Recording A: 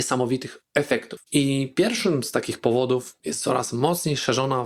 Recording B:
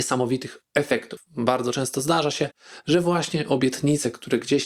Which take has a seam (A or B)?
A